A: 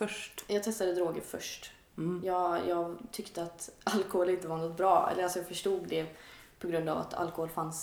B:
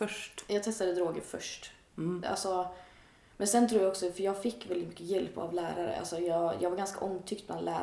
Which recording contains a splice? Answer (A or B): B